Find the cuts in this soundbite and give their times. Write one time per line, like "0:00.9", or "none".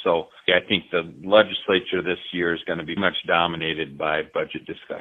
0:03.0